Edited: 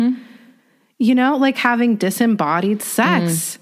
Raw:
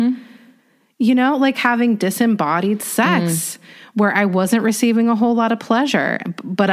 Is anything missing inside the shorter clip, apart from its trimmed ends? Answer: no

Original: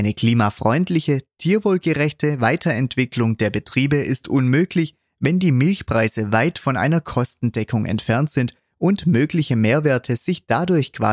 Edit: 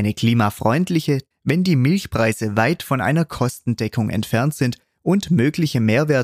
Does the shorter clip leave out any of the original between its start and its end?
yes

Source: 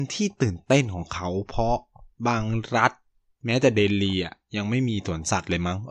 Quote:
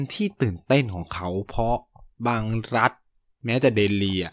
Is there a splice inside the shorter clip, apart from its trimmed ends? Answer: no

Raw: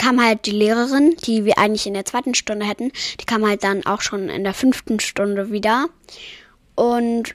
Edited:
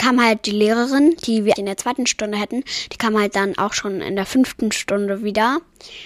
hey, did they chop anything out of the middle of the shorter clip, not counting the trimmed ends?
yes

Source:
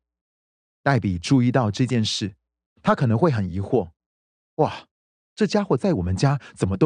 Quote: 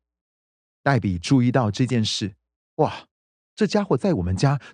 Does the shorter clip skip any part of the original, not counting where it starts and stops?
yes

